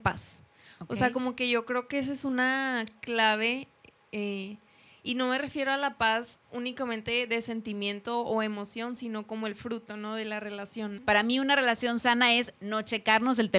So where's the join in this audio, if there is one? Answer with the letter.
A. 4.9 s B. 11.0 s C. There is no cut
B